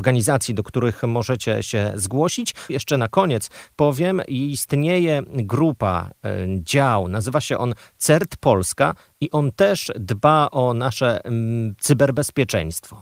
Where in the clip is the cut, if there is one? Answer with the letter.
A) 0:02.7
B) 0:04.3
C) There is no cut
A